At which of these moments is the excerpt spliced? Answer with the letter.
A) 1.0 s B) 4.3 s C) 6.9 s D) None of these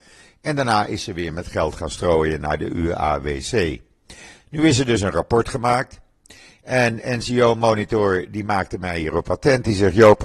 D